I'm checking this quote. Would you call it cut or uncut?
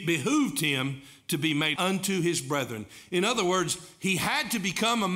cut